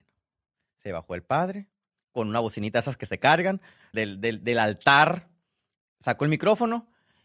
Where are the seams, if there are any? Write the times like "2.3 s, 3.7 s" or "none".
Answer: 3.9 s